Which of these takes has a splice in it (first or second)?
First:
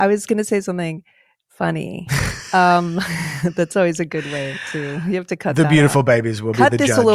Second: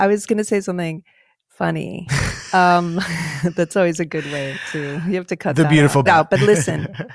second